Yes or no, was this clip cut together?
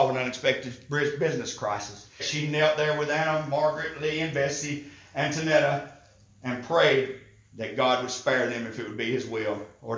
yes